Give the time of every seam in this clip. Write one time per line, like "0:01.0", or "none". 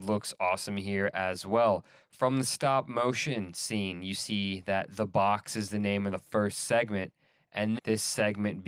0:07.8